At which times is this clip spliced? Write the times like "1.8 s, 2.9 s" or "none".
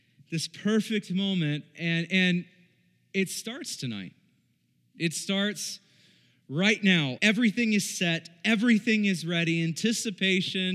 7.2 s